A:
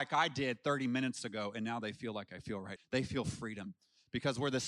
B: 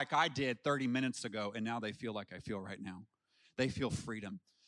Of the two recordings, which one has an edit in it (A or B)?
A